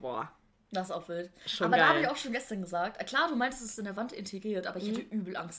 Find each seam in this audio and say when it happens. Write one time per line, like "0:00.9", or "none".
none